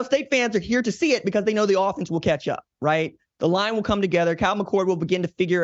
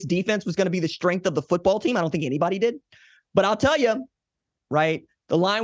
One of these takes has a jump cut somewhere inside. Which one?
second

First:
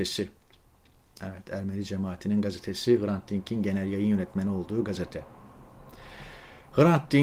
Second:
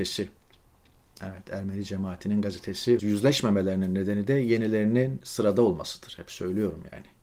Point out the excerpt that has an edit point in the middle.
second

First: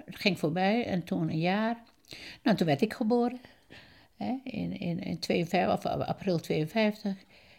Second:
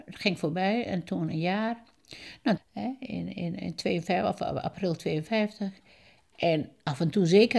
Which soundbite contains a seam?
second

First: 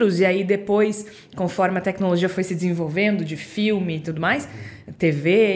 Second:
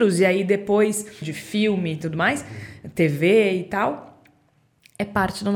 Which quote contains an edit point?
second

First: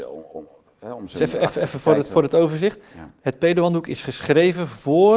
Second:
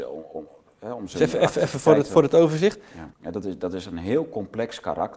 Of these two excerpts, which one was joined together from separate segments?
second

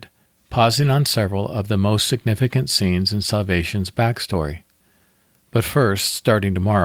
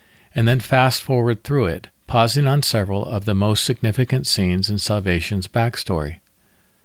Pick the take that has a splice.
second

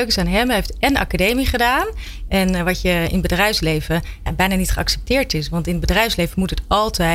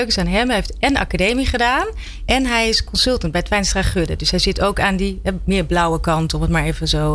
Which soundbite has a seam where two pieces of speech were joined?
first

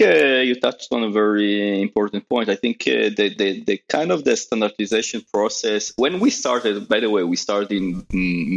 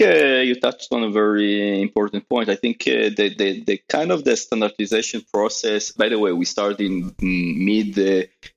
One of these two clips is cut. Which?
second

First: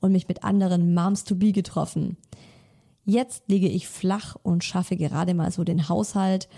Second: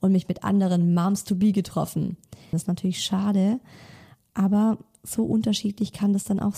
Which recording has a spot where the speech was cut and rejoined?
second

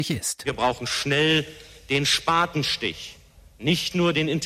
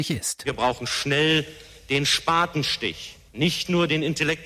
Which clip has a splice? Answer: second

